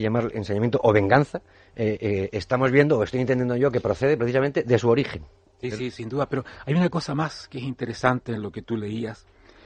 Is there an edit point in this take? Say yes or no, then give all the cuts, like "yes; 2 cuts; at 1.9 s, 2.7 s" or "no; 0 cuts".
no; 0 cuts